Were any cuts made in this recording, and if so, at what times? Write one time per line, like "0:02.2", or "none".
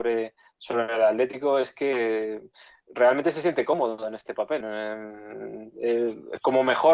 0:04.6